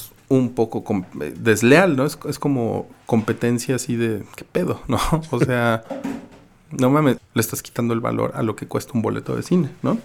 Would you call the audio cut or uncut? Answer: cut